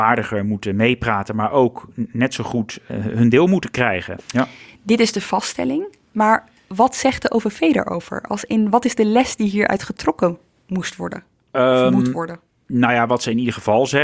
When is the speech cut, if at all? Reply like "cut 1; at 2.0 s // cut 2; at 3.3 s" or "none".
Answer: cut 1; at 4.2 s